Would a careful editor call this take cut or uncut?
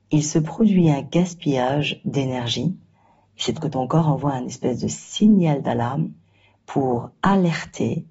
cut